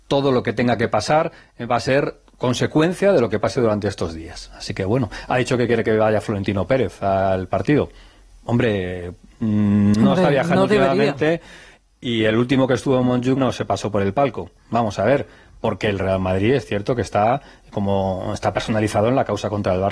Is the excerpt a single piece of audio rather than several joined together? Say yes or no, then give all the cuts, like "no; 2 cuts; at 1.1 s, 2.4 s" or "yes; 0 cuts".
no; 2 cuts; at 8.3 s, 13.4 s